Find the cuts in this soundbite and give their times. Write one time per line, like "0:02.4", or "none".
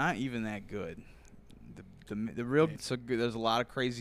0:02.7

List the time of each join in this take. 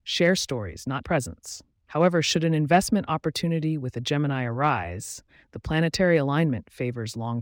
0:01.0

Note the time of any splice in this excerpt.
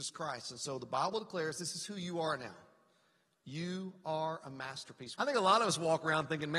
0:05.1

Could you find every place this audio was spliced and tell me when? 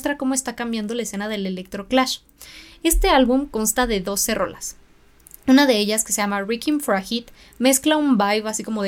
none

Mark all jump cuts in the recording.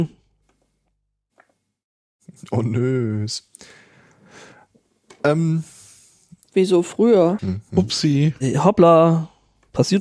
0:07.4

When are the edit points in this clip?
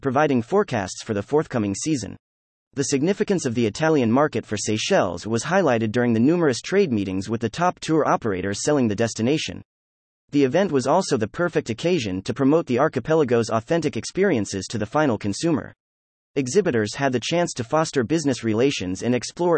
0:02.6
0:16.2

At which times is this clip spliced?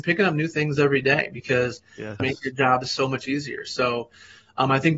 0:02.2

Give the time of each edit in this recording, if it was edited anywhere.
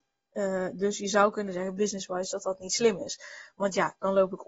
none

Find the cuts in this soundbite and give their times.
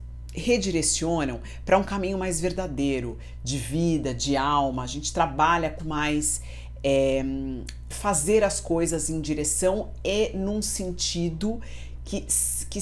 0:05.8
0:07.9

